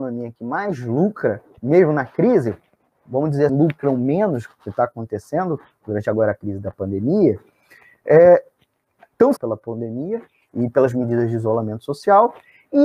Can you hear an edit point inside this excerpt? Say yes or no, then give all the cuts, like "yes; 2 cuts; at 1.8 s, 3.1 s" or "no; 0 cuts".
yes; 2 cuts; at 3.5 s, 9.4 s